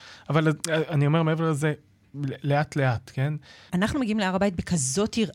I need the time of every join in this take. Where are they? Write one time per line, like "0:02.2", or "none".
0:03.7